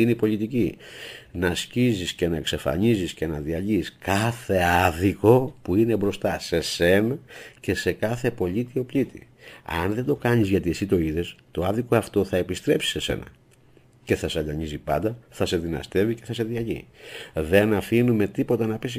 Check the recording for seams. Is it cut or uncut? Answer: uncut